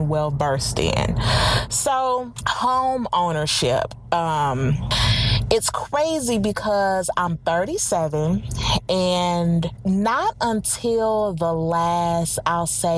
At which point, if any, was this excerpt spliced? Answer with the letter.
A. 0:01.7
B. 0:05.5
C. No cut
C